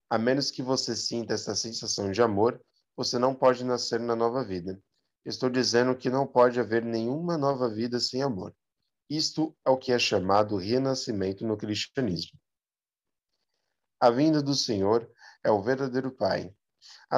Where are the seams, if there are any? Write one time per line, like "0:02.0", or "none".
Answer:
none